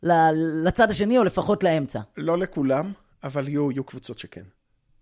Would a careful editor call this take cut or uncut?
uncut